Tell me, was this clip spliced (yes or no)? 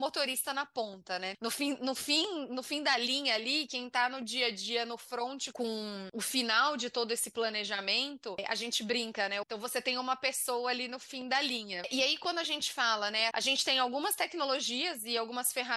yes